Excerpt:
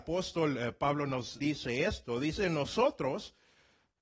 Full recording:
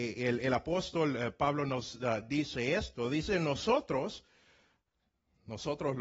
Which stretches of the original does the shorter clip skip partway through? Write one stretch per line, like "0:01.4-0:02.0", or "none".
0:02.0-0:02.3

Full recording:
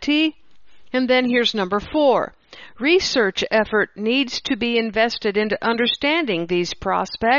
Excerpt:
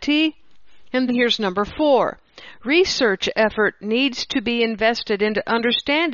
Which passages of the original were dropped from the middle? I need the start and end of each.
0:01.1-0:01.2

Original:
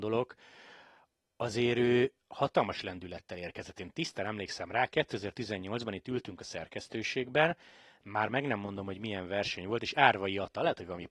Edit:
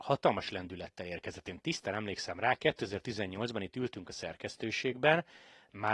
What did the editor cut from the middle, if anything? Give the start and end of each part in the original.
none

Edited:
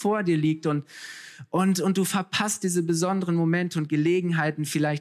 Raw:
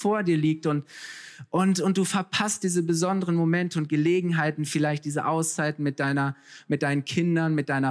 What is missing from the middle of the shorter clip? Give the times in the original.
none

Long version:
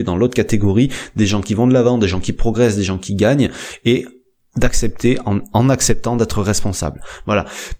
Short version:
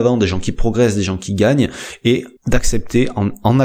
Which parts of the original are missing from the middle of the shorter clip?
0:04.2-0:04.5

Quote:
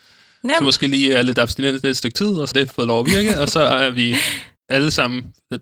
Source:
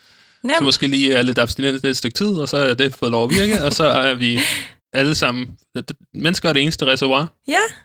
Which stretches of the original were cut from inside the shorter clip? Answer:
0:02.5-0:02.8

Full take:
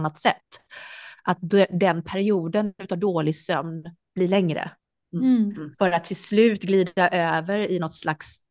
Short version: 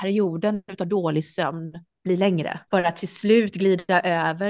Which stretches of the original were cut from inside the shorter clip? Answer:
0:04.8-0:05.8

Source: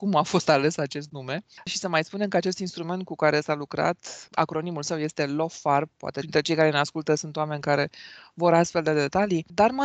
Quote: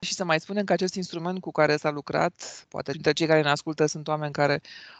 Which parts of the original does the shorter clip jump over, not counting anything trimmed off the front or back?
0:04.3-0:05.9

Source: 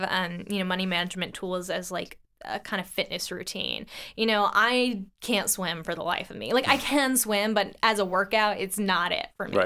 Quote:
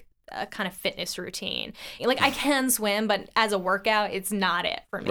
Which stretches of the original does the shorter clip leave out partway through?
0:04.1-0:06.5

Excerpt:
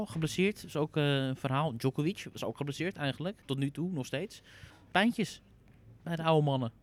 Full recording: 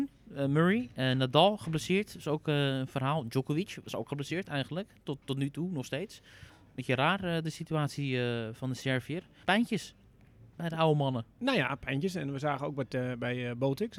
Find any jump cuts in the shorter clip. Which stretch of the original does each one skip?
0:04.9-0:05.2
0:06.7-0:09.4

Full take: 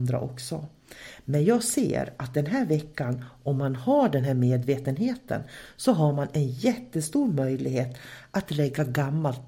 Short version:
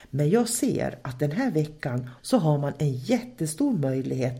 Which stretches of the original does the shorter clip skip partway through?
0:03.3-0:05.7

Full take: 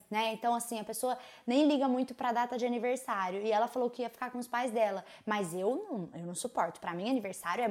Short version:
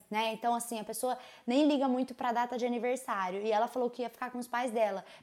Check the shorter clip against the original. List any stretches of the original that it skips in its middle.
none

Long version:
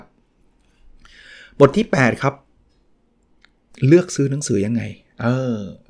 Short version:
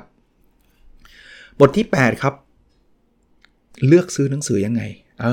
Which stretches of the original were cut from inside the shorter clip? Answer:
none

